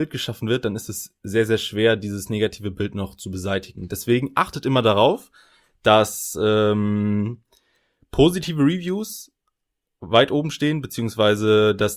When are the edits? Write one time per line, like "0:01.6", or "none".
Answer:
none